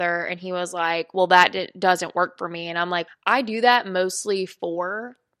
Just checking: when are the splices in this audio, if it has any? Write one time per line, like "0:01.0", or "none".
0:03.1

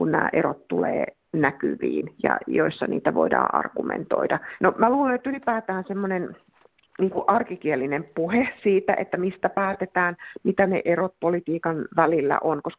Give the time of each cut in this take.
0:04.6

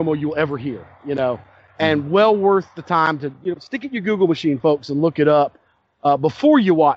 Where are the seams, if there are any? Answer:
none

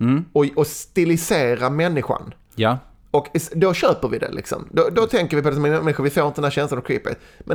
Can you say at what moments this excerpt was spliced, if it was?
none

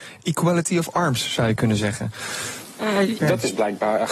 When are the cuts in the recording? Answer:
0:03.2

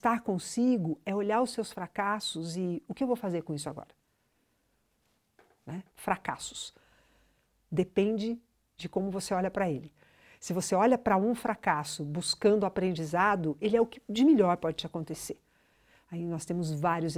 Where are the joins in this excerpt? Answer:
0:05.9

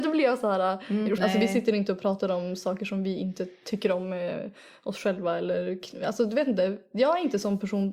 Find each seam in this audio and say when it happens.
0:01.2

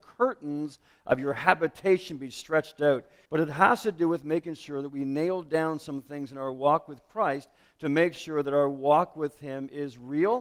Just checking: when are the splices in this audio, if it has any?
0:03.3

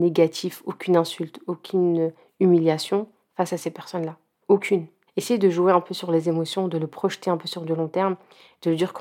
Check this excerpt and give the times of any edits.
0:05.1

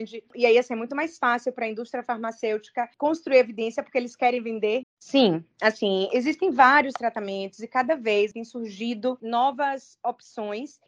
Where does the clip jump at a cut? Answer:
0:04.8

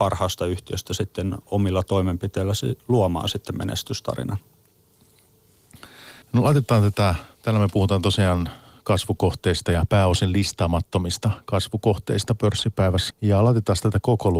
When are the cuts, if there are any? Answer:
0:06.2
0:13.1

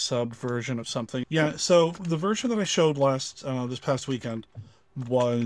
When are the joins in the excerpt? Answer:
0:01.2

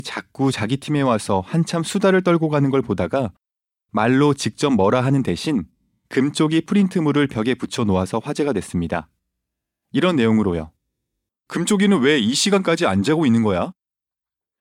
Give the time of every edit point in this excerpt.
0:11.3

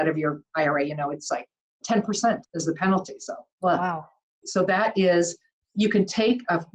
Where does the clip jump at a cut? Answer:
0:02.4
0:04.4

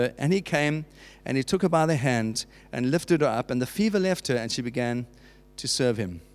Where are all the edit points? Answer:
none

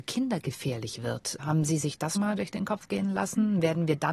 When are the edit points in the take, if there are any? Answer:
0:02.1

